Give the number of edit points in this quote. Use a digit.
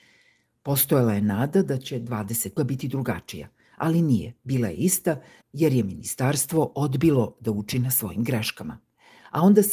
1